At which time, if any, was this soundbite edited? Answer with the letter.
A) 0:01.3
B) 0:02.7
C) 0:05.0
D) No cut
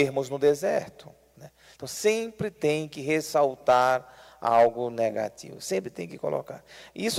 A